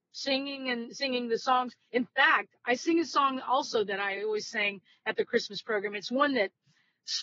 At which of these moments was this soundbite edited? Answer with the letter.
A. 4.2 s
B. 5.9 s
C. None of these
C